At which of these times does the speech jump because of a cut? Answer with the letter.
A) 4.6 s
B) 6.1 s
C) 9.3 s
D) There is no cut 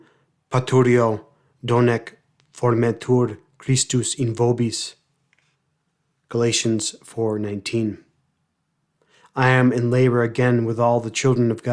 D